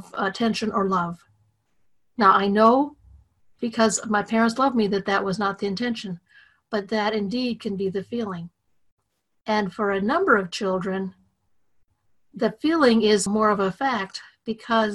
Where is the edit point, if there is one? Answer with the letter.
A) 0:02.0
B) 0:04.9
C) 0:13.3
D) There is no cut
C